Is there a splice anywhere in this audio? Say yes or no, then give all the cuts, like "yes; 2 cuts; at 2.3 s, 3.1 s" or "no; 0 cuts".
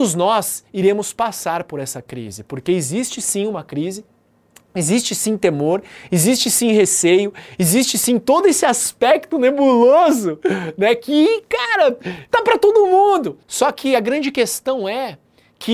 yes; 1 cut; at 13.4 s